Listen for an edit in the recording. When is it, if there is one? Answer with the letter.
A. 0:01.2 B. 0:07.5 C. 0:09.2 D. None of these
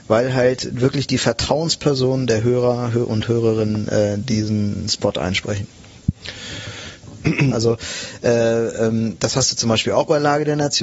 B